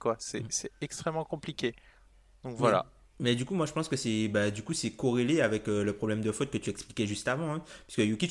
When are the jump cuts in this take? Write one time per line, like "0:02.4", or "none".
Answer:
none